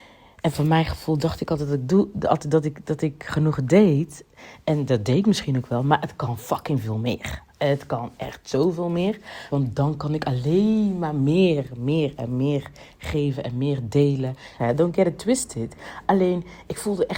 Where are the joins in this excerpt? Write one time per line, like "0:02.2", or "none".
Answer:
0:09.5
0:14.6